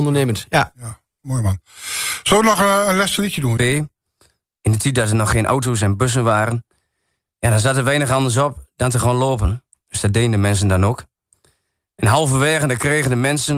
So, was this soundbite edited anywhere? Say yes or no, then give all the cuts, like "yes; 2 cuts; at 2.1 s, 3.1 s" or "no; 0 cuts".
yes; 1 cut; at 3.6 s